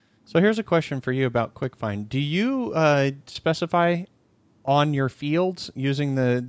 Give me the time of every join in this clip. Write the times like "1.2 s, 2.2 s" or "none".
none